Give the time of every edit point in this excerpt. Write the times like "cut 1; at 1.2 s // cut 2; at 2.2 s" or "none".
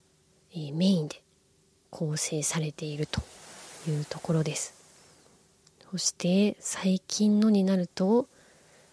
none